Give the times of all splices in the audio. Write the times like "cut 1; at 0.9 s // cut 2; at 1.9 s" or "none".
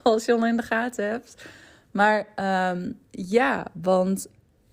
none